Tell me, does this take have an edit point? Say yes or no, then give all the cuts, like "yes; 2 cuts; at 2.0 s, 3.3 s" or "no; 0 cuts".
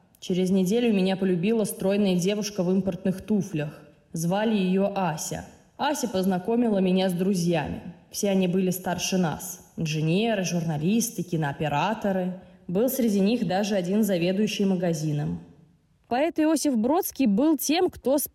no; 0 cuts